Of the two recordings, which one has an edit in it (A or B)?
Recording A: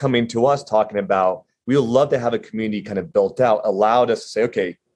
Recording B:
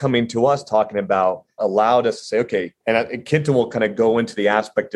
B